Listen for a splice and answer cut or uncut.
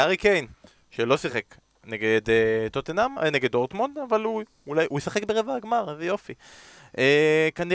cut